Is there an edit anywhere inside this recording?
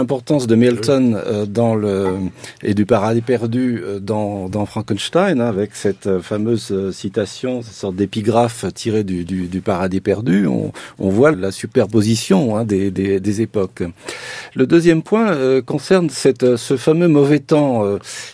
yes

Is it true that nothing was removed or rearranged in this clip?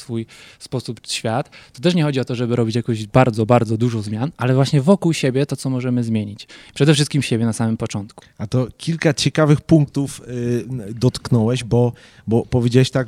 no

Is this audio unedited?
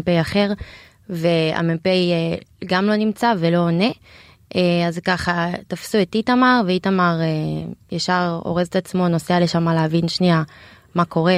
yes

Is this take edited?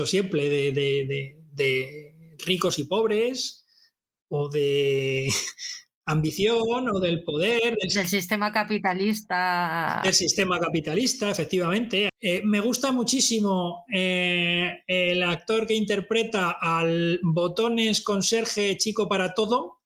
yes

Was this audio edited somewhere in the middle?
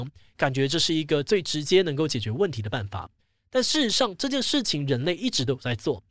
no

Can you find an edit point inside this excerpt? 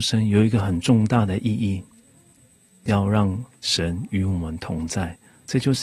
no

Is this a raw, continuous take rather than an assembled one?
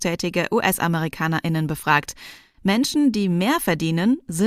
no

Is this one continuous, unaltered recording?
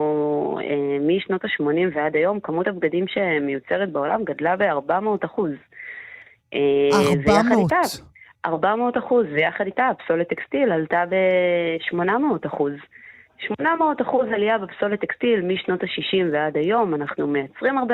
yes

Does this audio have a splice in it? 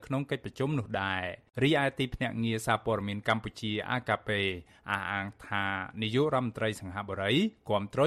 yes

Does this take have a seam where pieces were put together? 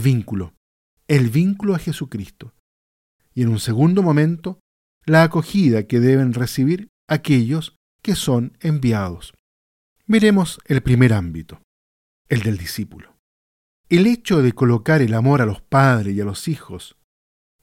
no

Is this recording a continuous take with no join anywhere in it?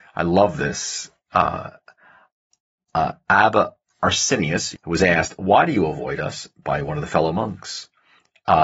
no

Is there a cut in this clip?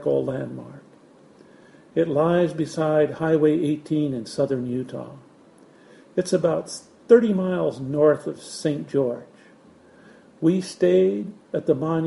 no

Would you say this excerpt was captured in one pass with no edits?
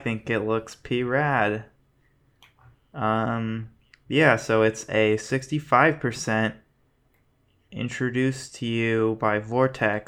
yes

